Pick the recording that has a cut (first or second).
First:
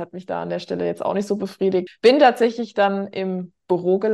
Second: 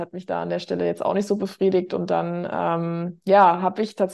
first